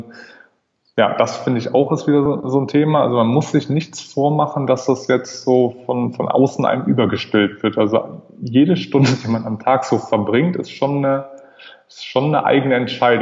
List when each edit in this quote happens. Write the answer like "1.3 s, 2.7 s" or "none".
none